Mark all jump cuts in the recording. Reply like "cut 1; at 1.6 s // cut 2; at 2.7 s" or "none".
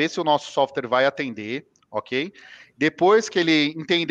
none